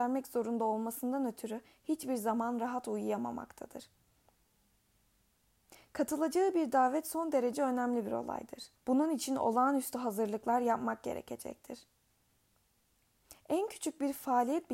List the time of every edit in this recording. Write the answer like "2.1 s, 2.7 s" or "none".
8.8 s